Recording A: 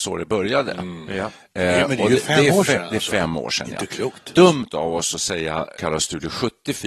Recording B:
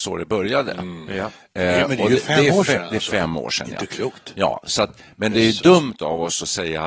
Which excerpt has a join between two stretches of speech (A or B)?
A